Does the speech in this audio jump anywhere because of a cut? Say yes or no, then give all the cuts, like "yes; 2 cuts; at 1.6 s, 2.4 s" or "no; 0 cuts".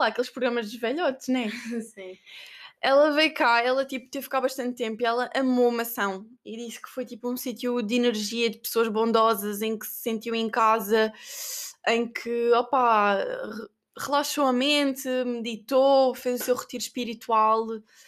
no; 0 cuts